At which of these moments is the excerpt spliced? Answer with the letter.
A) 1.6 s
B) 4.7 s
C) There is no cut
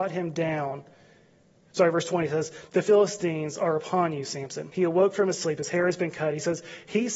C